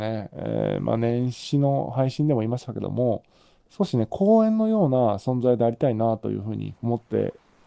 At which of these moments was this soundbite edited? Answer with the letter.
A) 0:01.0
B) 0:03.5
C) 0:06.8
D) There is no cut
C